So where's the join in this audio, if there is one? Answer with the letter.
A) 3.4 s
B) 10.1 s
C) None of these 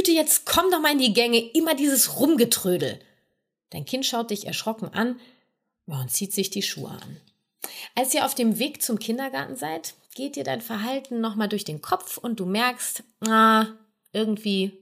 C